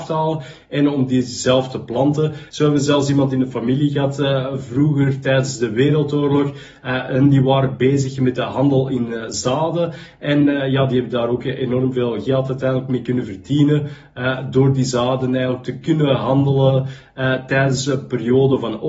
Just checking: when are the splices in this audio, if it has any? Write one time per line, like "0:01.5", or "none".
0:02.5